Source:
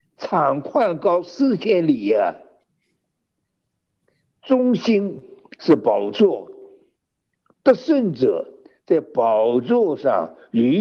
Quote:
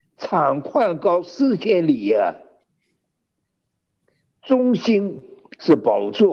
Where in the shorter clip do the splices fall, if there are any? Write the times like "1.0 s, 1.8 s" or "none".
none